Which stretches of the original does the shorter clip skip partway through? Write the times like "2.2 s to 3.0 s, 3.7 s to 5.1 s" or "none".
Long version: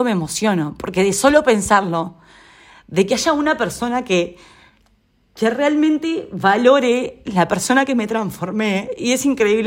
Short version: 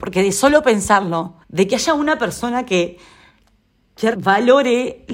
2.2 s to 2.8 s, 5.5 s to 6.3 s

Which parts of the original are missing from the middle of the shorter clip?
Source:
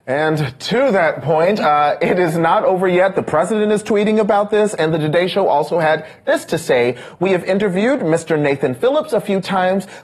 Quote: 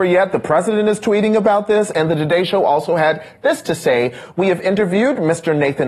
none

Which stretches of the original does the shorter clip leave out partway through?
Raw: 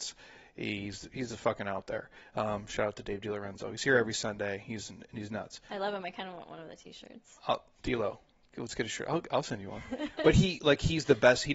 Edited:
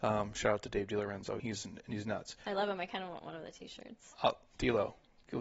3.7 s to 4.6 s

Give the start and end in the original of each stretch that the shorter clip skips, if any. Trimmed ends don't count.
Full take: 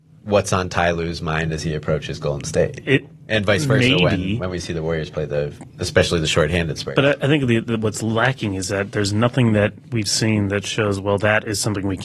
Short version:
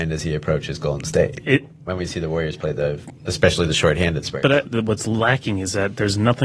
3.3 s to 4.4 s, 7.2 s to 7.6 s

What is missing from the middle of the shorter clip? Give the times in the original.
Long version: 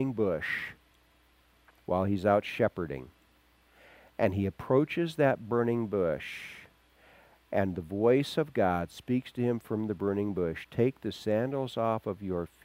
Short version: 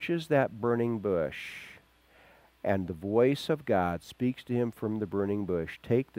none

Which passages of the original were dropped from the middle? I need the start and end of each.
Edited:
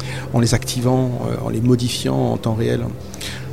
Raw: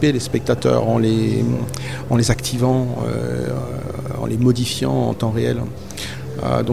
3.1 s to 4.1 s

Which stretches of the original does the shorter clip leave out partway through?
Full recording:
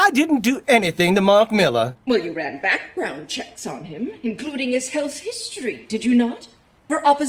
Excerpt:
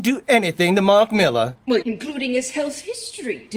2.2 s to 4.2 s

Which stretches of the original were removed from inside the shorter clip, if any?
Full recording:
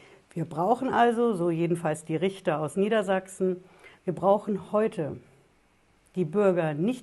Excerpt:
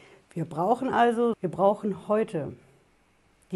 1.3 s to 4.0 s

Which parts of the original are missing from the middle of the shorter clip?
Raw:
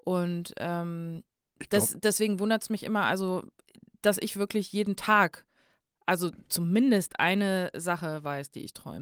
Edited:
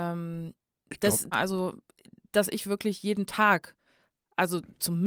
2.0 s to 3.0 s

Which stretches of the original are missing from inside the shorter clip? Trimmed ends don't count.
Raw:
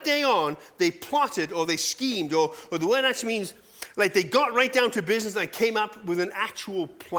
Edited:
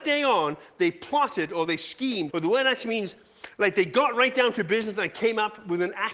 2.3 s to 2.7 s

